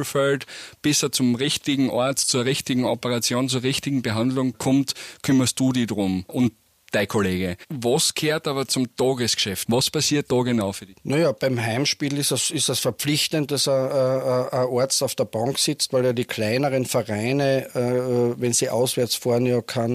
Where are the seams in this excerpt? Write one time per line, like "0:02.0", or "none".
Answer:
0:09.6